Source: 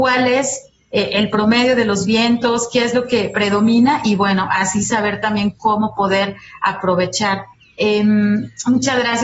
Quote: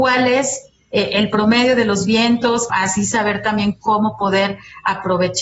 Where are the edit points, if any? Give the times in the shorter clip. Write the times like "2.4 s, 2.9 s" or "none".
2.7 s